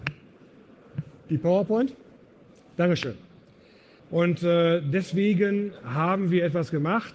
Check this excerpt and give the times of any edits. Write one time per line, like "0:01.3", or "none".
0:04.0